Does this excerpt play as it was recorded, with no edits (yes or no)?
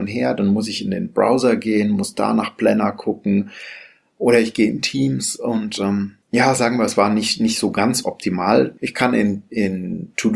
no